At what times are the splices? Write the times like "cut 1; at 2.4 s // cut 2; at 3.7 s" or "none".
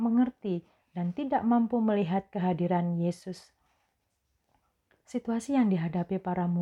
none